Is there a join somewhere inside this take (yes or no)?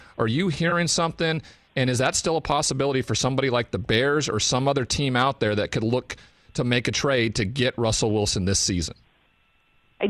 no